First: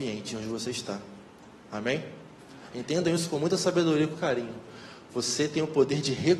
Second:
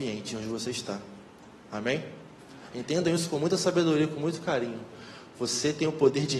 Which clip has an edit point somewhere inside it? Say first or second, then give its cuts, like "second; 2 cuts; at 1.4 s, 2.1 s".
first; 1 cut; at 4.1 s